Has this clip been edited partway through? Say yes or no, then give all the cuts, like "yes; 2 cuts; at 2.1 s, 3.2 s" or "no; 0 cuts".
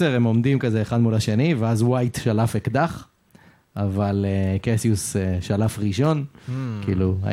no; 0 cuts